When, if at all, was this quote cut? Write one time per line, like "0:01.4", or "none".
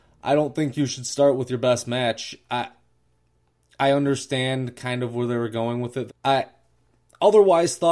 0:06.1